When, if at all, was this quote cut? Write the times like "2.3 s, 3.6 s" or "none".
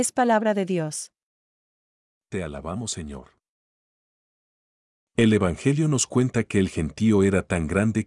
5.0 s